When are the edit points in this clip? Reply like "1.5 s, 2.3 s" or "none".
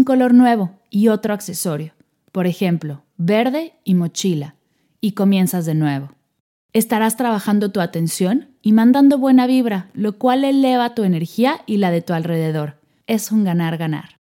none